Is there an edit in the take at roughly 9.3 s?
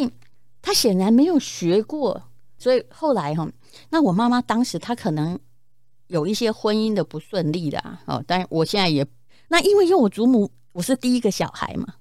yes; 2 cuts; at 2.6 s, 9.3 s

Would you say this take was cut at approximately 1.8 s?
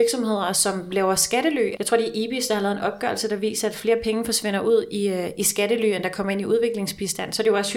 yes; 1 cut; at 1.8 s

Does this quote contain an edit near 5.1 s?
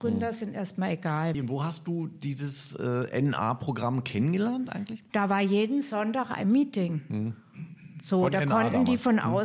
yes; 2 cuts; at 1.3 s, 5.1 s

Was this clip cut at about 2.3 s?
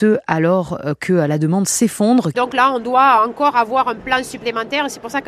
yes; 1 cut; at 2.3 s

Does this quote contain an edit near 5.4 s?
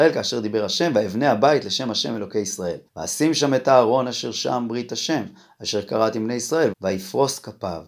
no; 2 cuts; at 2.9 s, 6.7 s

